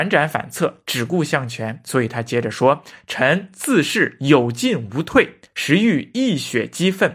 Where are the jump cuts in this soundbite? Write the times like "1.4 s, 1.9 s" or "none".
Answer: none